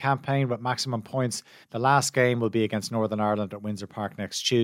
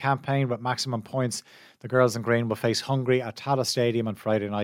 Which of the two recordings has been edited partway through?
first; 1 cut; at 1.6 s

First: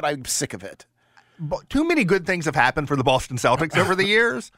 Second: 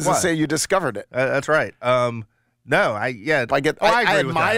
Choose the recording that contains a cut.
second; 1 cut; at 3.5 s

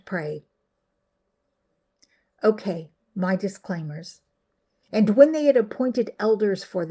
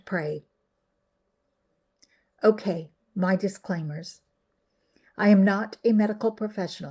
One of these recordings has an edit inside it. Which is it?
first; 1 cut; at 4.8 s

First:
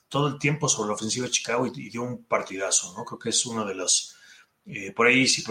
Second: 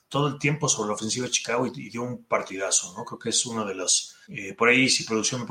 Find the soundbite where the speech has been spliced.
second; 1 cut; at 4.2 s

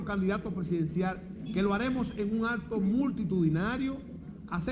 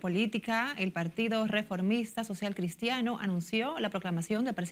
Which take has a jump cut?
first; 1 cut; at 1.5 s

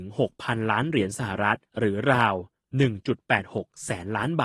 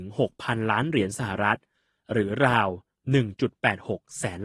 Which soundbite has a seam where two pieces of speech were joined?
first; 1 cut; at 1.7 s

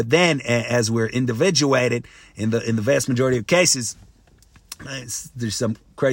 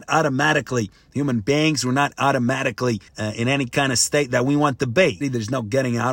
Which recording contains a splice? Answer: second; 2 cuts; at 3.1 s, 5.2 s

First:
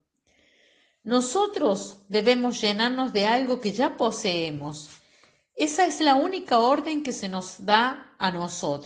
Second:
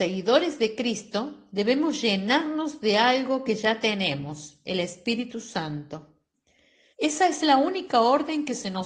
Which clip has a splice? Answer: second; 1 cut; at 6.9 s

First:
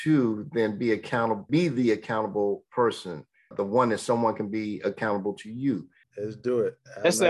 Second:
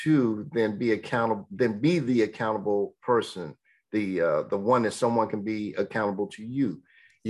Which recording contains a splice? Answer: first; 3 cuts; at 1.5 s, 3.5 s, 6.0 s

